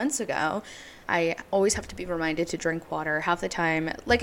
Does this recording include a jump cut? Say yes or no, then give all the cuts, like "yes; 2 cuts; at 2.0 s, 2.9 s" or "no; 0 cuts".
yes; 1 cut; at 1.0 s